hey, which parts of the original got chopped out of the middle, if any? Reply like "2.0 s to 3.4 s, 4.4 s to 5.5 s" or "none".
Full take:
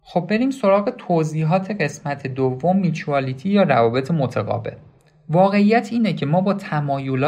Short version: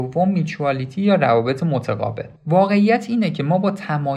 4.8 s to 5.2 s